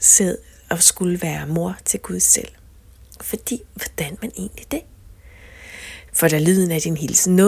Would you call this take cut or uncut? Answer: cut